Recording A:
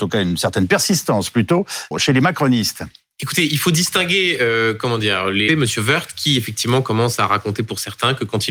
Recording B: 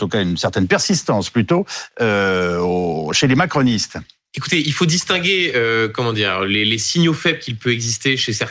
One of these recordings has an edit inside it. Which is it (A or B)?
A